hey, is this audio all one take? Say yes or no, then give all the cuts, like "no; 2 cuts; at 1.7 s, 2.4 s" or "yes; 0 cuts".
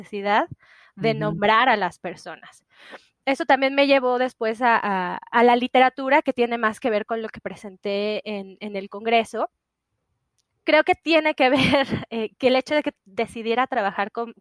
no; 1 cut; at 10.5 s